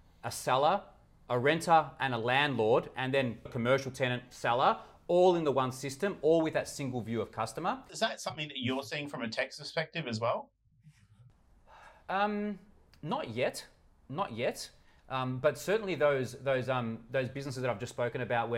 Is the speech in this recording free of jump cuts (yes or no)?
no